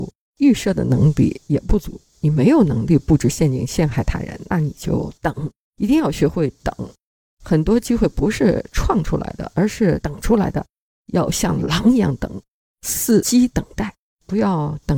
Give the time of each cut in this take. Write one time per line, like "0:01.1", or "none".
none